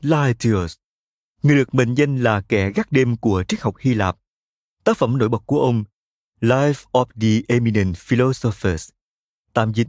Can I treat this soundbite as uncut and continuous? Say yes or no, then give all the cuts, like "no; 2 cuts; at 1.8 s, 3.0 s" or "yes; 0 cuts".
yes; 0 cuts